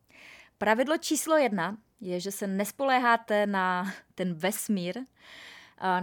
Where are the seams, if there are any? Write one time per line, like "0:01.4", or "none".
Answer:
none